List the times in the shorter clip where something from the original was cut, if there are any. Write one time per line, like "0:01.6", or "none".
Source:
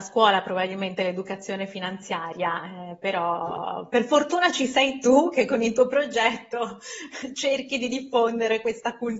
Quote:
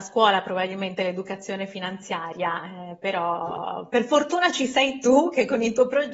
none